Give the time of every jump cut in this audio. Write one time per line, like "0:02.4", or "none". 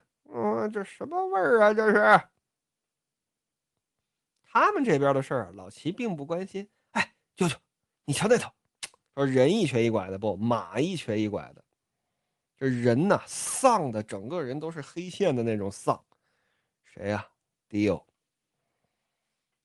0:09.1